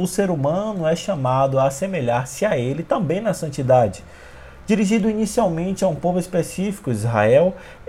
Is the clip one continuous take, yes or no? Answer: yes